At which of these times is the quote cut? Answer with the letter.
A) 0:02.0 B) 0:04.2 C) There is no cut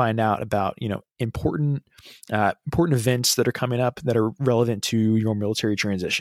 C